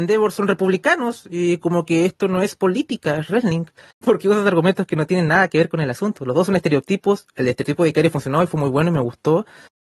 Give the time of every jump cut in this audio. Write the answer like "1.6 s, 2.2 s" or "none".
4.0 s